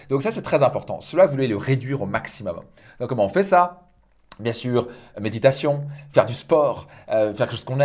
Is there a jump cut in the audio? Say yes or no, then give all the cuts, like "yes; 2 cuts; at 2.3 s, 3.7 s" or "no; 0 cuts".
no; 0 cuts